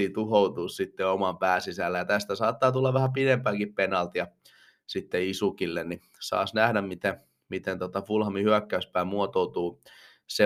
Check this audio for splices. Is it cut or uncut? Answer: uncut